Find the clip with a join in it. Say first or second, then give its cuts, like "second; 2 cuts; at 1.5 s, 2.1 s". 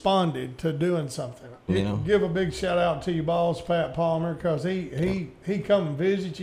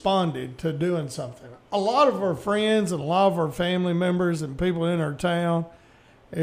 first; 1 cut; at 1.7 s